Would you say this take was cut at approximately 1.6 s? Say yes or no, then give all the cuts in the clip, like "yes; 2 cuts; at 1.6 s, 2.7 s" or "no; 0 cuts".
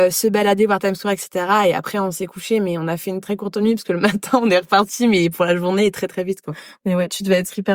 no; 1 cut; at 3.2 s